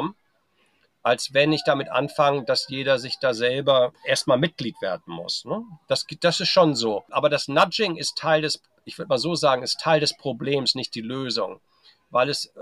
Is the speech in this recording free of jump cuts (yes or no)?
yes